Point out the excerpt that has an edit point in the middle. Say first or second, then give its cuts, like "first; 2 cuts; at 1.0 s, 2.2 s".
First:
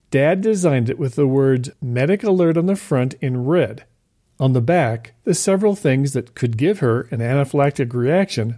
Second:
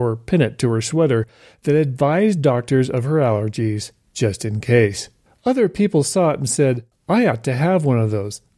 second; 1 cut; at 5.3 s